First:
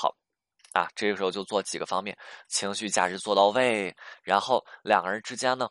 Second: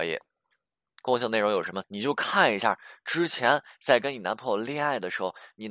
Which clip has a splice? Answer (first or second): second